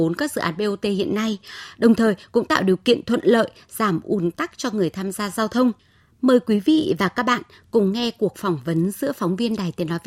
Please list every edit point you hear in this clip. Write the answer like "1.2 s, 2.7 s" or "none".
none